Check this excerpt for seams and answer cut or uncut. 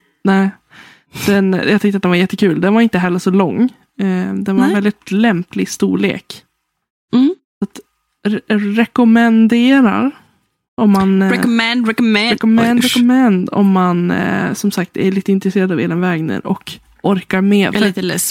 uncut